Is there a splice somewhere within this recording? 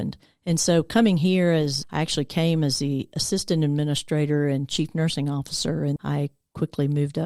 yes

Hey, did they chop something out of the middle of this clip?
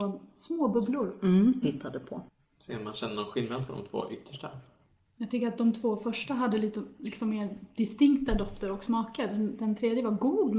yes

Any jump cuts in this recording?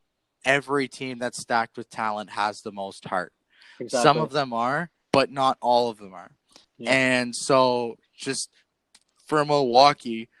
yes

